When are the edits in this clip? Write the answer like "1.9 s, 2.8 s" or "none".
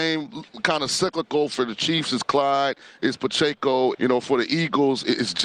3.9 s